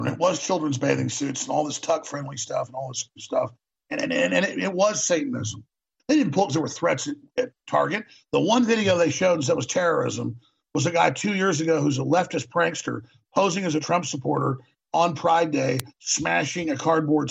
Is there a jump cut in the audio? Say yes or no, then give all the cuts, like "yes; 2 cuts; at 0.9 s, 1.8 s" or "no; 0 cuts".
yes; 1 cut; at 6.0 s